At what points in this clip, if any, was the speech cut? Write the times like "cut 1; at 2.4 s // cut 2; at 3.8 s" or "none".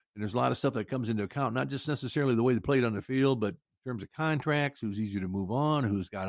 none